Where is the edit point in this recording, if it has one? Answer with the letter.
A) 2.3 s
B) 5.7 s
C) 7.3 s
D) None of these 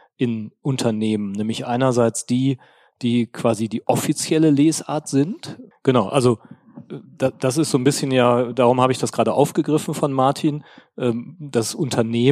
B